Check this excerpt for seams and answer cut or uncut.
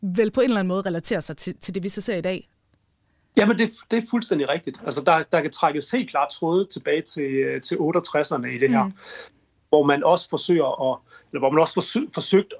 uncut